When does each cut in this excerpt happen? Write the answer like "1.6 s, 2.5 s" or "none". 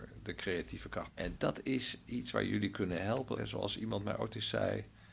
1.1 s, 3.4 s